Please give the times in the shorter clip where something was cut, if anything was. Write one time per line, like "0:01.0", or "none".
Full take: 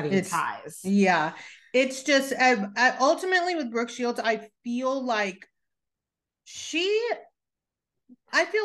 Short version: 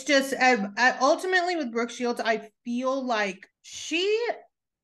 0:03.5